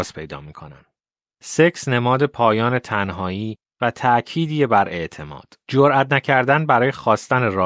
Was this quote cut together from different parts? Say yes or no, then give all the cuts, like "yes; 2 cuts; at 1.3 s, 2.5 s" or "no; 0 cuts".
yes; 1 cut; at 1.3 s